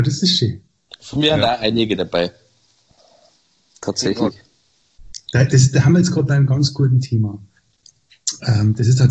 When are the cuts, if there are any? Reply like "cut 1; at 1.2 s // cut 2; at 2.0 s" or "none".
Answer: none